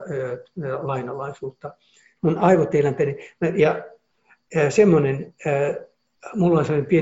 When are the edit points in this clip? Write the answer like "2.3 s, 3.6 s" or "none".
2.2 s